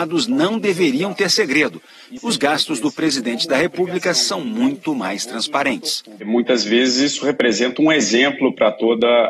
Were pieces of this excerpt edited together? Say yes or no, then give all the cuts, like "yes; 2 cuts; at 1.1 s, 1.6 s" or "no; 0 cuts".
yes; 1 cut; at 2.2 s